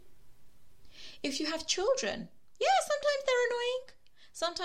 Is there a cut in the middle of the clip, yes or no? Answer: no